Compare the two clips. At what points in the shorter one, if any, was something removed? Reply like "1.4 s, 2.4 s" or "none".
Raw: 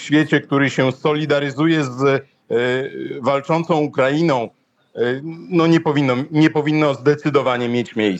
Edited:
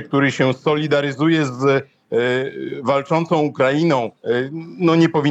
4.2 s